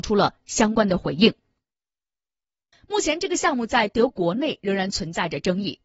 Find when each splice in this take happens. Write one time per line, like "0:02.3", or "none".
0:02.7
0:04.1